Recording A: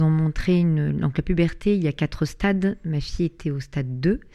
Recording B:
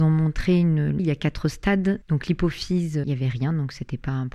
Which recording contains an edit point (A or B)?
B